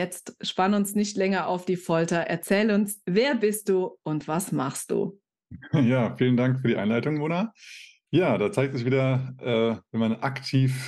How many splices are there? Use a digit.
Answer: 0